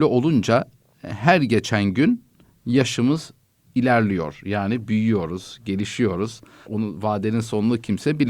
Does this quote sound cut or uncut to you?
cut